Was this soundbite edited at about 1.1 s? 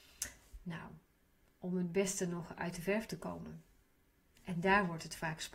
no; 1 cut; at 4.4 s

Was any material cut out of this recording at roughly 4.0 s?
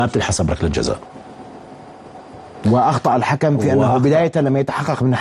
no; 0 cuts

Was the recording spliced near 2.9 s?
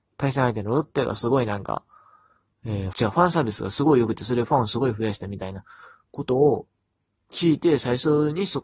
yes; 1 cut; at 2.9 s

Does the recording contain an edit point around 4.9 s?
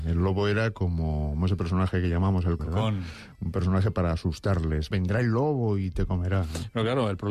yes; 2 cuts; at 2.6 s, 4.9 s

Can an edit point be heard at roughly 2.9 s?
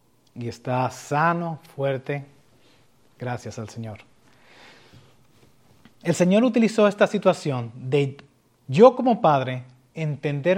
no; 0 cuts

